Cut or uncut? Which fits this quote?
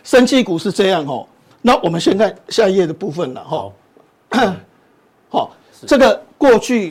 uncut